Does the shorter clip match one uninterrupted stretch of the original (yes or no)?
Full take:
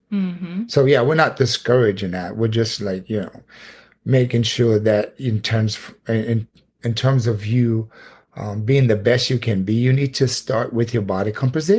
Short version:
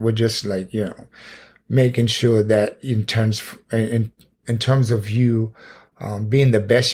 yes